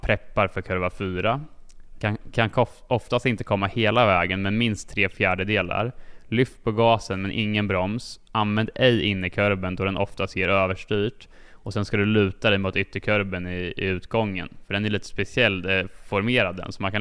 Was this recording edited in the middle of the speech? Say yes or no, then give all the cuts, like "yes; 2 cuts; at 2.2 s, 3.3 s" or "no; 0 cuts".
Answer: yes; 1 cut; at 2.0 s